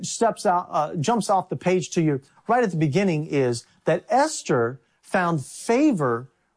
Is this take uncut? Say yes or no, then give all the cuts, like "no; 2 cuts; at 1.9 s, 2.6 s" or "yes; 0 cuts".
yes; 0 cuts